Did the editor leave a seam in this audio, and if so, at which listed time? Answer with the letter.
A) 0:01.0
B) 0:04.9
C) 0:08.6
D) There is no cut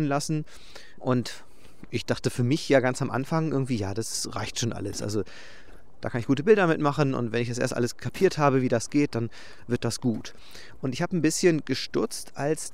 A